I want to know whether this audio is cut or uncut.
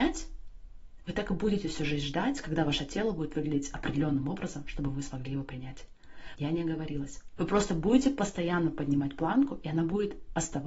cut